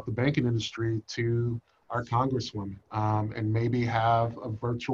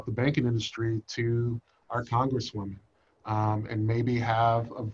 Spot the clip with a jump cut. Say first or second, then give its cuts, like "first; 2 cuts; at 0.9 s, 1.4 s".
first; 1 cut; at 2.8 s